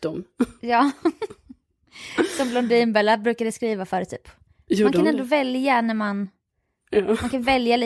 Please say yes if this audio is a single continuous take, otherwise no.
yes